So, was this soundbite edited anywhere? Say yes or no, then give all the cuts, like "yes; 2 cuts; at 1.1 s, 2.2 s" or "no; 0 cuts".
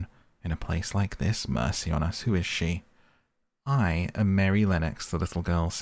no; 0 cuts